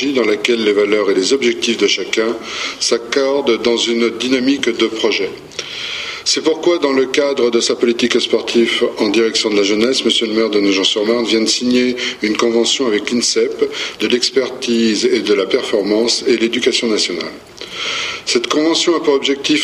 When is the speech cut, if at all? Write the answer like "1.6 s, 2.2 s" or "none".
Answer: 14.0 s